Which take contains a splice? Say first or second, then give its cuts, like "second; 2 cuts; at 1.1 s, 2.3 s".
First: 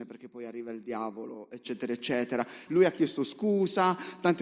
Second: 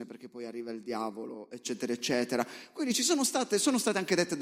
first; 1 cut; at 2.7 s